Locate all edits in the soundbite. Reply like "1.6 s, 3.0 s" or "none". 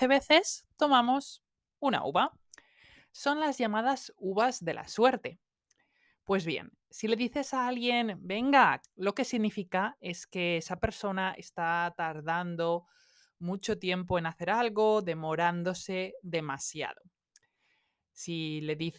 8.8 s